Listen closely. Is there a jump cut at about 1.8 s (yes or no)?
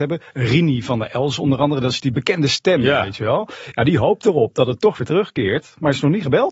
no